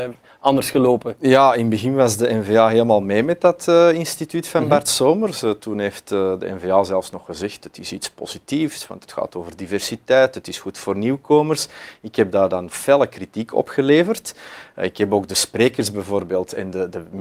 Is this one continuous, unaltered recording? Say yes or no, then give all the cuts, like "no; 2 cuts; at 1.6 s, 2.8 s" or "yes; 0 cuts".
yes; 0 cuts